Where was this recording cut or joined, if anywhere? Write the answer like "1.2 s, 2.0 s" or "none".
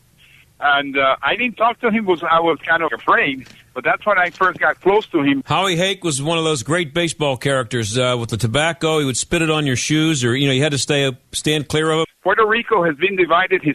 2.9 s, 5.4 s, 12.0 s

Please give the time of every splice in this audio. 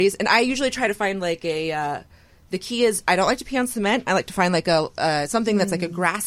none

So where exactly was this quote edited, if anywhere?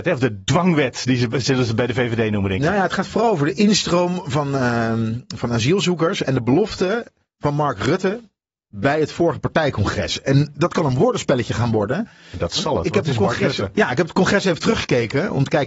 none

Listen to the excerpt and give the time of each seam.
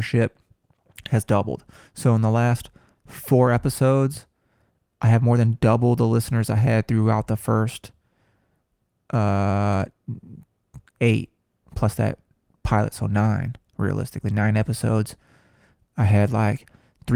none

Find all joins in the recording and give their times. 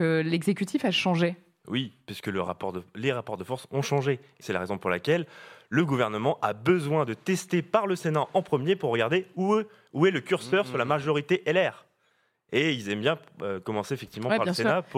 4.4 s

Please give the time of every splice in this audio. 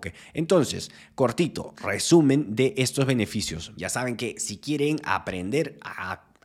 3.7 s

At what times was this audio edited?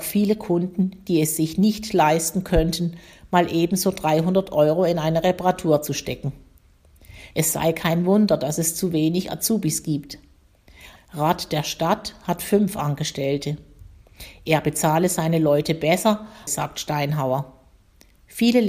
7.3 s, 11.0 s, 16.5 s

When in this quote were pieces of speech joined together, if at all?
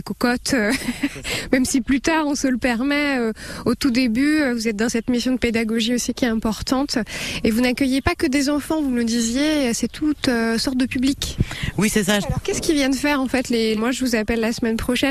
12.2 s, 13.8 s

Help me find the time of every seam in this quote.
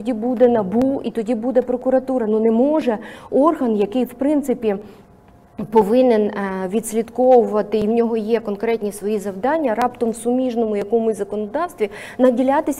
none

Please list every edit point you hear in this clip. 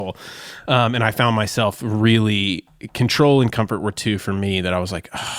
none

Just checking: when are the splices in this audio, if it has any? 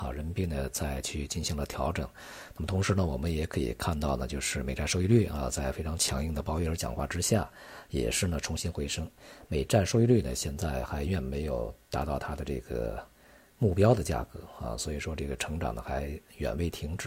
11.1 s

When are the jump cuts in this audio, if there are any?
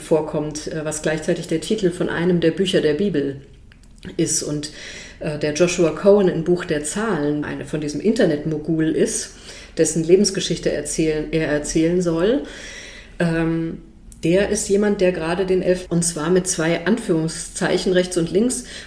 7.4 s, 15.9 s

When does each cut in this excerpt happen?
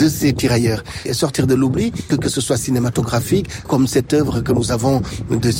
1.1 s, 2.1 s, 3.7 s

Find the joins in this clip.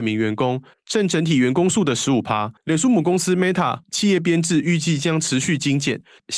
2.6 s, 3.8 s

